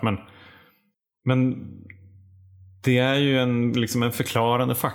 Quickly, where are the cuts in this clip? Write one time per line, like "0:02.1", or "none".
none